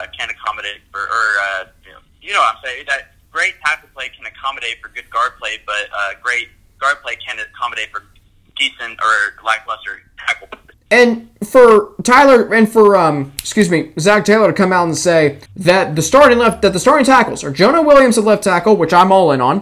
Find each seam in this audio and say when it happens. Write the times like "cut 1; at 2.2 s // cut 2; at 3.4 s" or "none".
cut 1; at 10.7 s // cut 2; at 15.5 s